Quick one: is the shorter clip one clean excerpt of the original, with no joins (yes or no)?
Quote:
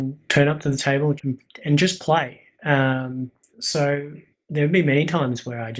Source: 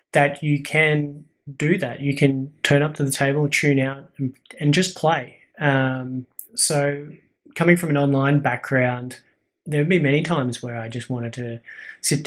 no